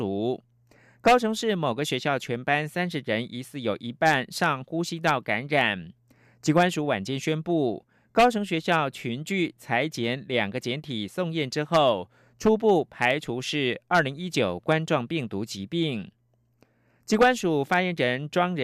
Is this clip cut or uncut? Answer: uncut